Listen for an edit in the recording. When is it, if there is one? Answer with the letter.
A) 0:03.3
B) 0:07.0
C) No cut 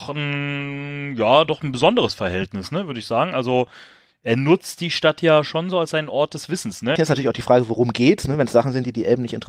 B